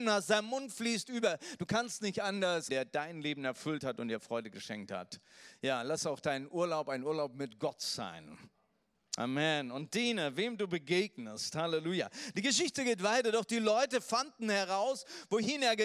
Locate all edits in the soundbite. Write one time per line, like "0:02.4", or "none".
0:02.7